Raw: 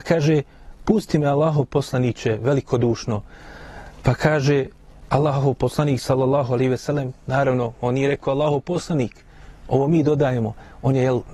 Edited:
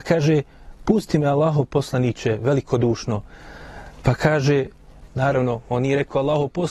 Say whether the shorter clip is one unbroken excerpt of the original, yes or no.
no